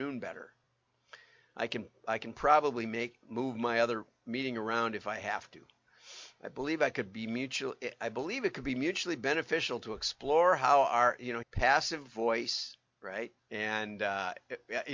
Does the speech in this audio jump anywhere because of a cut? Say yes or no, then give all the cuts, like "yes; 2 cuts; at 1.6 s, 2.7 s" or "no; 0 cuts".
yes; 2 cuts; at 11.4 s, 13.4 s